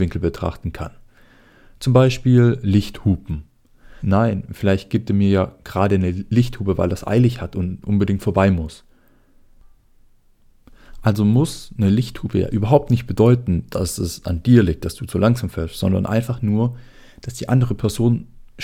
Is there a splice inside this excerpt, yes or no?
yes